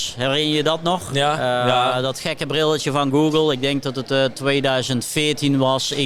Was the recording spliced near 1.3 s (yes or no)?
no